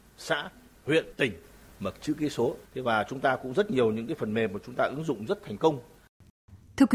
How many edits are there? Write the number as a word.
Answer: two